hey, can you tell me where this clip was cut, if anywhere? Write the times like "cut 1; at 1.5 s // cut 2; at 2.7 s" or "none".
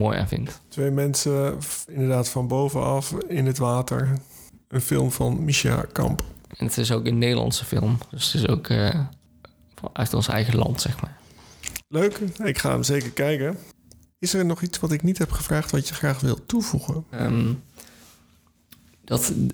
cut 1; at 17.1 s